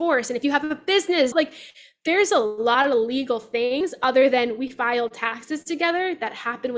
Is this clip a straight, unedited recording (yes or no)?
no